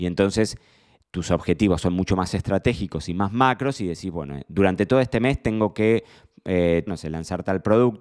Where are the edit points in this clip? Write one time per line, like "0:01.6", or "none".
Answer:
0:06.9